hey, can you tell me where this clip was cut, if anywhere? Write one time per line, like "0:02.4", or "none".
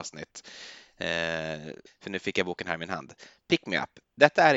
0:01.9